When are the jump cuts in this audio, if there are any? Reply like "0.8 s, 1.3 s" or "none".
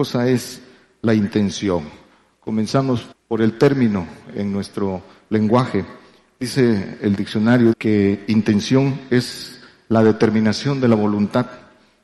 3.1 s, 7.7 s